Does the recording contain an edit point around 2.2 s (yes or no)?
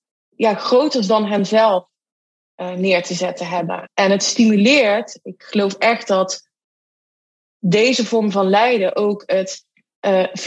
no